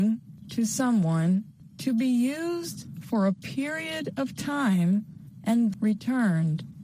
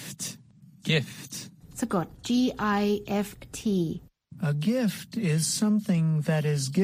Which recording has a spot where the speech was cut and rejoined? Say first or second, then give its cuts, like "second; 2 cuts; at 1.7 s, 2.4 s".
first; 1 cut; at 5.7 s